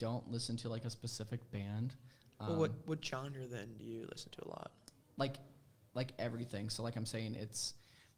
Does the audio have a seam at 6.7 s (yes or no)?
no